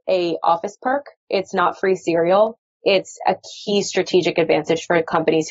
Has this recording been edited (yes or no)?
no